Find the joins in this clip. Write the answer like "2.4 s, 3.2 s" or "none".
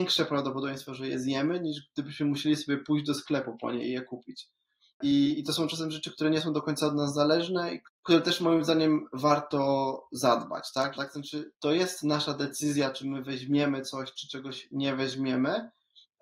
7.9 s, 10.9 s